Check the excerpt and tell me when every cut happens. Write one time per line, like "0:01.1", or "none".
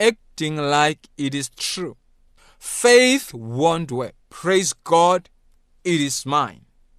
0:04.2